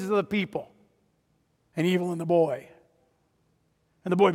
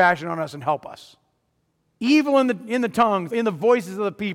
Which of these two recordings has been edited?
second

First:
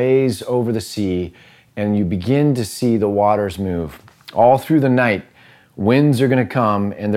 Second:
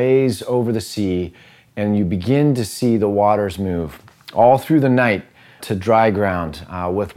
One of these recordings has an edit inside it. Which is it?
second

